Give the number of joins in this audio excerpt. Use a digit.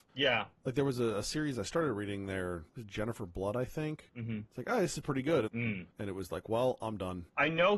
2